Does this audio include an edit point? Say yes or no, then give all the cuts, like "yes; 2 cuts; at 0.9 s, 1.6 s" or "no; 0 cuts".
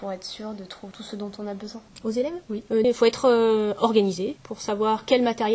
yes; 2 cuts; at 2.8 s, 4.4 s